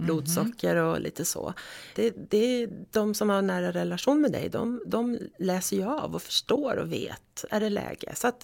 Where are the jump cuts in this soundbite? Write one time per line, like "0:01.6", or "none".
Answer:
0:02.0